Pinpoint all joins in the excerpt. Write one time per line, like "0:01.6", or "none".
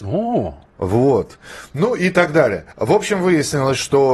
0:02.7